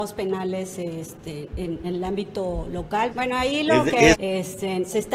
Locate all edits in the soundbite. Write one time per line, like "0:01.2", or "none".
0:01.8
0:03.1
0:04.1